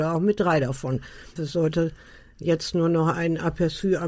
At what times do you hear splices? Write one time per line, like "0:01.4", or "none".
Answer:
0:01.4

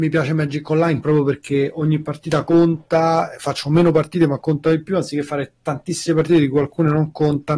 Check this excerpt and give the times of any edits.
none

